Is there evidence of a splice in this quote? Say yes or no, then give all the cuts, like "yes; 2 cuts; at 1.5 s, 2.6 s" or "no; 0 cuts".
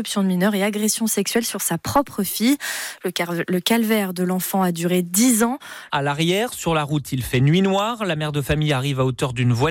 yes; 1 cut; at 5.9 s